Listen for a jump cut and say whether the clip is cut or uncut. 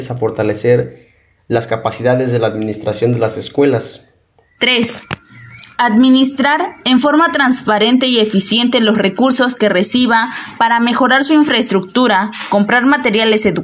cut